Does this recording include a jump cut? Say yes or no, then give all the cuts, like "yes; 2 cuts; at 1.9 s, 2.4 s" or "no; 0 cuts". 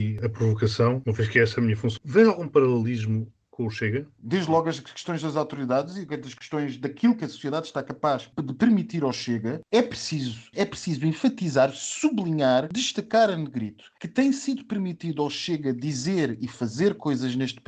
yes; 3 cuts; at 2.0 s, 4.2 s, 10.5 s